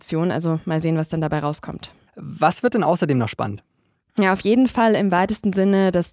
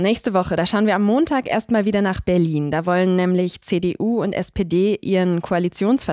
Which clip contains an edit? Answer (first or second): first